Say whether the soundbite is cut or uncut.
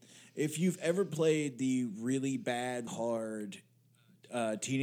cut